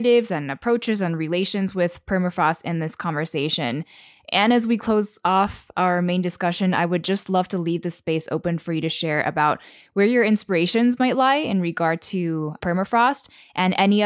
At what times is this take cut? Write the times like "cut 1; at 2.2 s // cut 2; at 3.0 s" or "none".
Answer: none